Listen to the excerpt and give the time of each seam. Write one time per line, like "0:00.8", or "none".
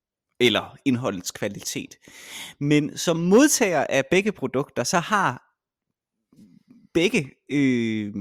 none